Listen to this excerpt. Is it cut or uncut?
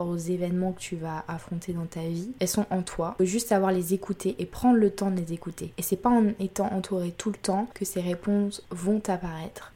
uncut